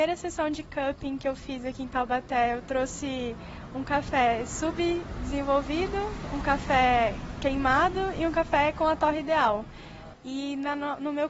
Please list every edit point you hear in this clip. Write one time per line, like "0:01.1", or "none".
0:10.1